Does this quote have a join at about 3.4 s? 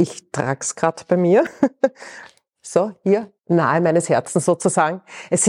yes; 1 cut; at 3.4 s

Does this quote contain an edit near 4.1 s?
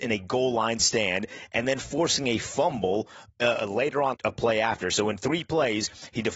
yes; 1 cut; at 4.1 s

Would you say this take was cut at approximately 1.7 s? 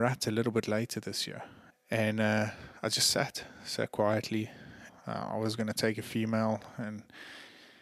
yes; 2 cuts; at 1.7 s, 4.9 s

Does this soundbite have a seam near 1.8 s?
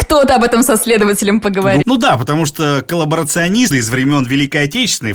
yes; 2 cuts; at 1.8 s, 3.7 s

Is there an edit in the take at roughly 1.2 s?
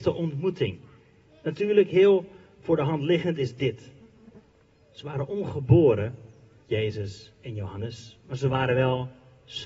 no; 0 cuts

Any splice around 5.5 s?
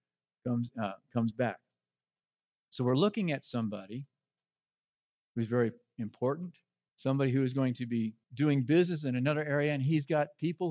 no; 2 cuts; at 6.9 s, 8.2 s

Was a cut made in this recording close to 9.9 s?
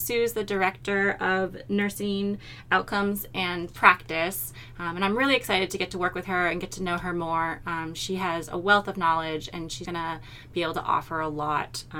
yes; 1 cut; at 9.9 s

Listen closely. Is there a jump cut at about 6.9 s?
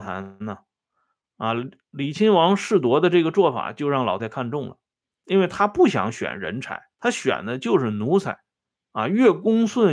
yes; 2 cuts; at 4.2 s, 6.9 s

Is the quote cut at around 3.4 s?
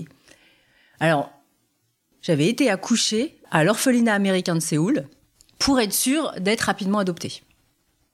yes; 2 cuts; at 2.1 s, 3.4 s

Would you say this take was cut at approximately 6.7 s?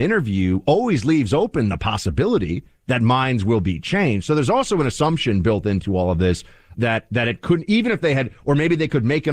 yes; 1 cut; at 6.7 s

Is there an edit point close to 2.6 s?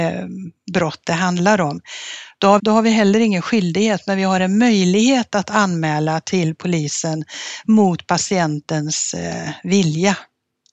yes; 1 cut; at 2.6 s

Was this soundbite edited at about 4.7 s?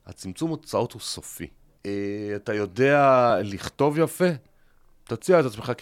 no; 1 cut; at 1.8 s

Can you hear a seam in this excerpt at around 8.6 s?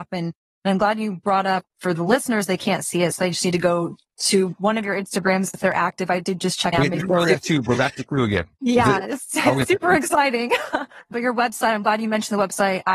no; 1 cut; at 6.7 s

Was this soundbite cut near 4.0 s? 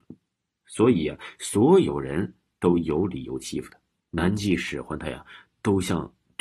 yes; 1 cut; at 4.0 s

